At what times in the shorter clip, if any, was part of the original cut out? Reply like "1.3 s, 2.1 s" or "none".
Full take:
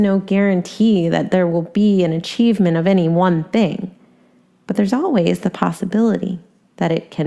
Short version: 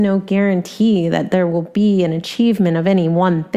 none